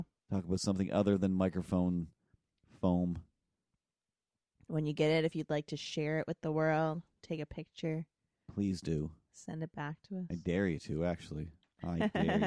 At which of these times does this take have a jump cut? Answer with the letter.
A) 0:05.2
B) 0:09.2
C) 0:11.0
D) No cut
D